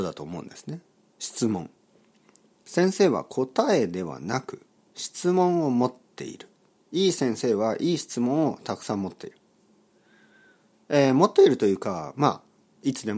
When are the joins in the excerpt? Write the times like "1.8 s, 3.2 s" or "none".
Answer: none